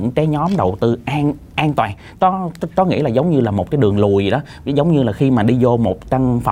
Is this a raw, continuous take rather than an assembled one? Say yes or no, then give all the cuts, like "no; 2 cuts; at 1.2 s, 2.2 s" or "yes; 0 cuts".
yes; 0 cuts